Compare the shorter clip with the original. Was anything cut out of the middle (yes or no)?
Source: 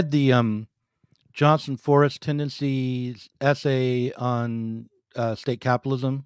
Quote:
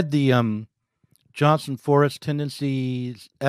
no